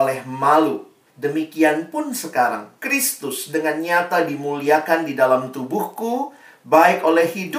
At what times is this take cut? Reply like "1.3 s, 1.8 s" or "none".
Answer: 1.1 s, 2.8 s